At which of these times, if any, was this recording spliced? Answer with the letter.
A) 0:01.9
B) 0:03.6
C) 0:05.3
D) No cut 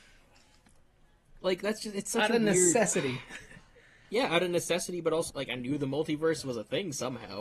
C